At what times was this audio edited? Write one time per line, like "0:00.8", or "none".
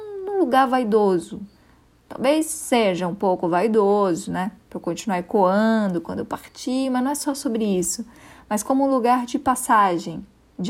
none